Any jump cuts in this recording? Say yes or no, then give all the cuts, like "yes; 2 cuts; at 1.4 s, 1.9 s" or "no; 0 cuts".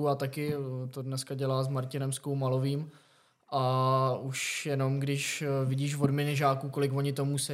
no; 0 cuts